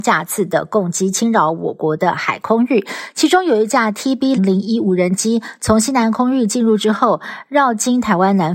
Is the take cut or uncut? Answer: cut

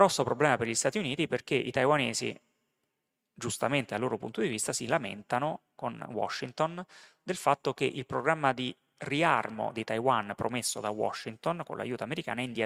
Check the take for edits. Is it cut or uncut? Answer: uncut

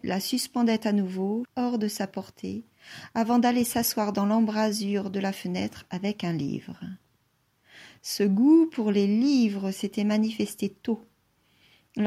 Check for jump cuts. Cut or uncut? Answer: cut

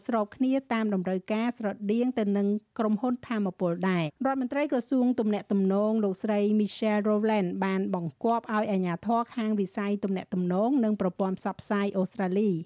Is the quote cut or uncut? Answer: cut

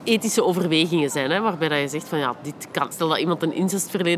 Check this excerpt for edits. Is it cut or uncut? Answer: cut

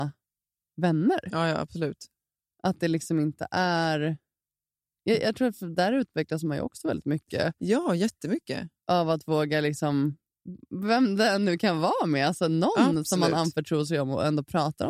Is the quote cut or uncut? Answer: uncut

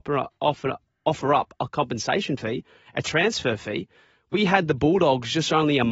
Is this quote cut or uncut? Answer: uncut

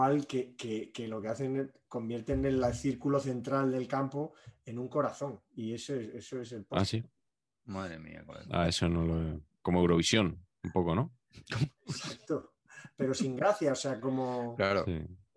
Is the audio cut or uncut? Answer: uncut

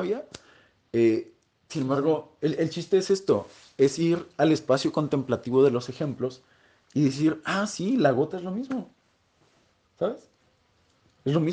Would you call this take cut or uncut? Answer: uncut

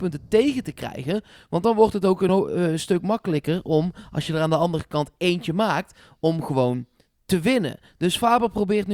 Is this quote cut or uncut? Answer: uncut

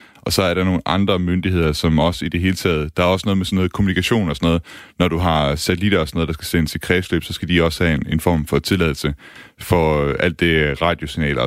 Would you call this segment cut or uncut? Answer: uncut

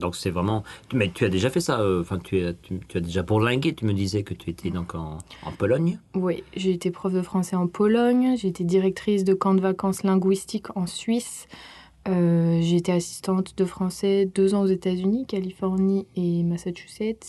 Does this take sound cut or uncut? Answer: uncut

